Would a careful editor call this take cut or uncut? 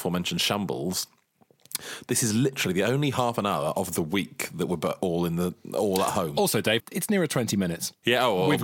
cut